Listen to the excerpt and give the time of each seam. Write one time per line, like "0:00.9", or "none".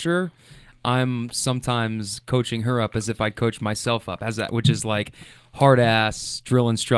0:04.5